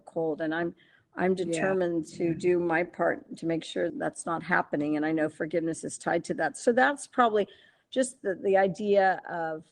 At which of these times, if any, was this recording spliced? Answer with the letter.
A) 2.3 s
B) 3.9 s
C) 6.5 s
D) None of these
B